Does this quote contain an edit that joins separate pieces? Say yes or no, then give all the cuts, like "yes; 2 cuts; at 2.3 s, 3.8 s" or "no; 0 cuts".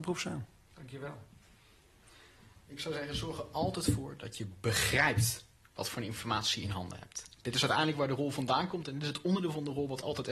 no; 0 cuts